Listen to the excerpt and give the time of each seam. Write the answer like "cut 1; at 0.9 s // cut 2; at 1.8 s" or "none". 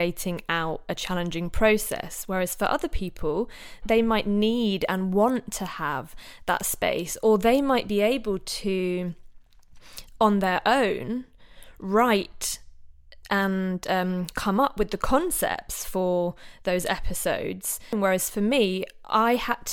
cut 1; at 3.8 s